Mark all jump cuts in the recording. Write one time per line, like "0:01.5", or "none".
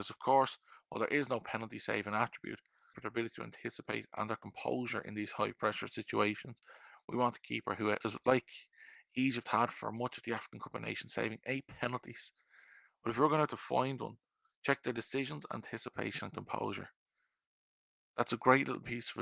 0:02.9
0:12.9